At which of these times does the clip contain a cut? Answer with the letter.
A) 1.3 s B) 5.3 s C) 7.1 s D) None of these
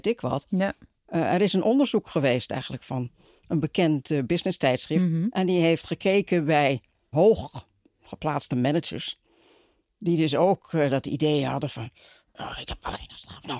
C